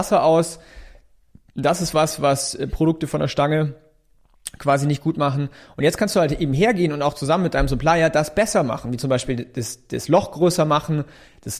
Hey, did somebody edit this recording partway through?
no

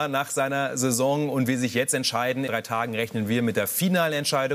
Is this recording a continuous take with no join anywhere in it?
no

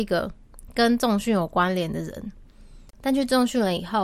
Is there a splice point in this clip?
no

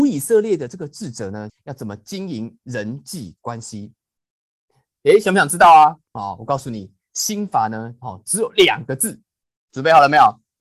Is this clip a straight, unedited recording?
no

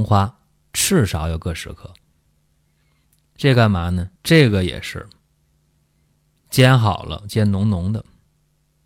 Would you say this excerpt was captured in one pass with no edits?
no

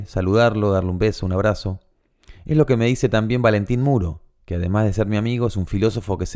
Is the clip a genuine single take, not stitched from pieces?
yes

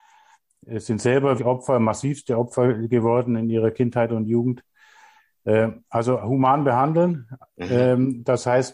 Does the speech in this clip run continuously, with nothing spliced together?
no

